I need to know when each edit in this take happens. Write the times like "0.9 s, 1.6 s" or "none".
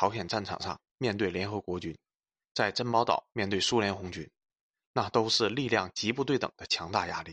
none